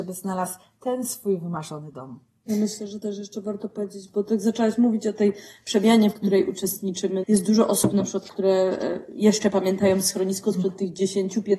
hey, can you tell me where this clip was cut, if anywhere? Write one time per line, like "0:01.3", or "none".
0:07.2

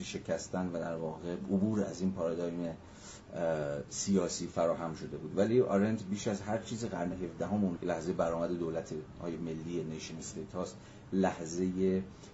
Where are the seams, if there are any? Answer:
0:07.8

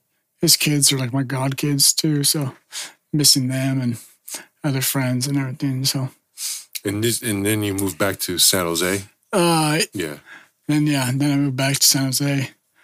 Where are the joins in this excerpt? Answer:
0:09.9

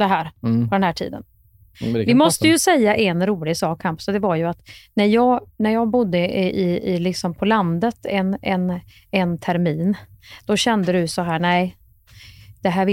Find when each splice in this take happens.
none

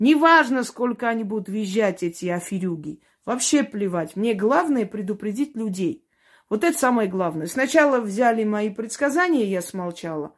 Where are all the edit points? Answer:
none

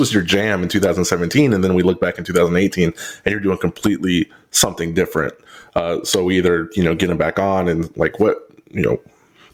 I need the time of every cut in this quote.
none

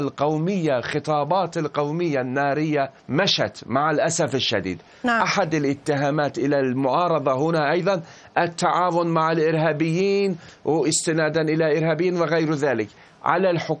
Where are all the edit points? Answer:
0:03.0

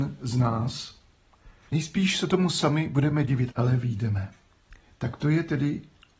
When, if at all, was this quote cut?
0:01.7
0:03.5

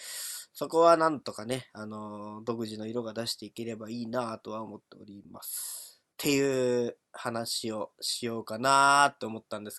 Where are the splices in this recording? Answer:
0:06.1

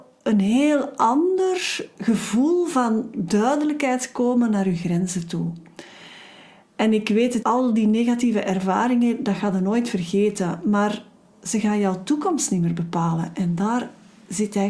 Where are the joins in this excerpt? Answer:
0:07.4

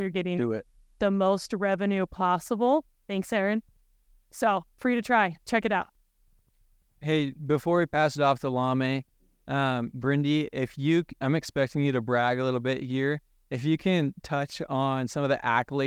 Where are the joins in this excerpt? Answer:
none

